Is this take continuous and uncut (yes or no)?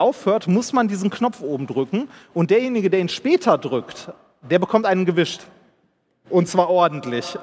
yes